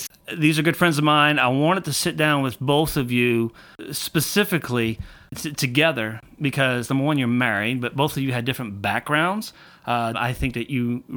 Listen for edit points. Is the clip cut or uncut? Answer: cut